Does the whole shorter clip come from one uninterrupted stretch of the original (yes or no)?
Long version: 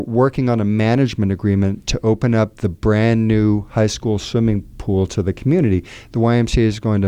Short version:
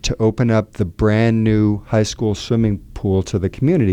yes